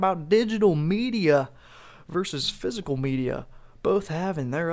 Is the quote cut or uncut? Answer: uncut